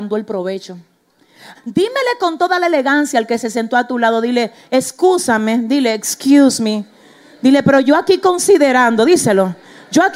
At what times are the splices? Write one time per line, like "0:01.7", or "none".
0:01.5